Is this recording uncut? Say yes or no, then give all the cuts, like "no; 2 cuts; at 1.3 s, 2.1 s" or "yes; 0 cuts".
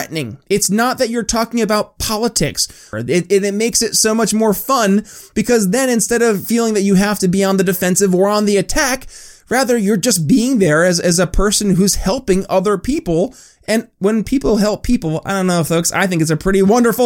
no; 1 cut; at 2.9 s